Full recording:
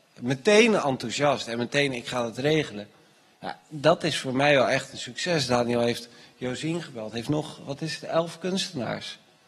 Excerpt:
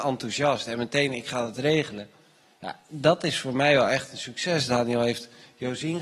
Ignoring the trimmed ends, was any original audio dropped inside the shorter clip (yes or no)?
no